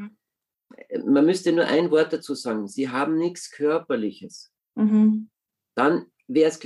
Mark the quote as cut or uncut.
uncut